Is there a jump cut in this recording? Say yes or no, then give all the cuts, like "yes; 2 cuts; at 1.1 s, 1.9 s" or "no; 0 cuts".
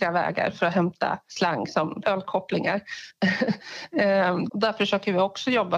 yes; 2 cuts; at 2.0 s, 4.5 s